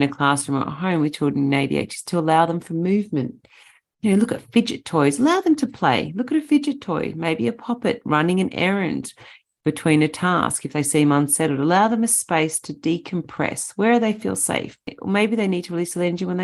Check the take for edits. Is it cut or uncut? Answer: uncut